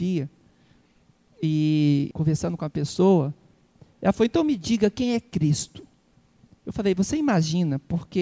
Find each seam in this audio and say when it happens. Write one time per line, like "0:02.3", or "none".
0:02.1